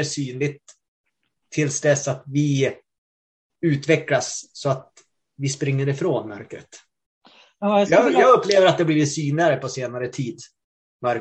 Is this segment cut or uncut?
uncut